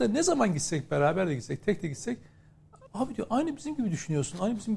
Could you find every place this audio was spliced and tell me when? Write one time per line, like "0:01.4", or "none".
0:02.9